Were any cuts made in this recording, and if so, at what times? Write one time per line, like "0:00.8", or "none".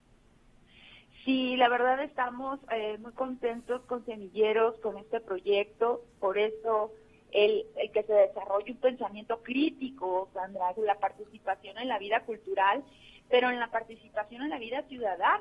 0:07.7
0:10.8